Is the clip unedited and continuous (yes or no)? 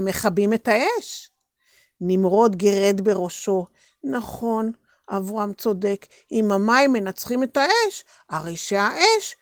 yes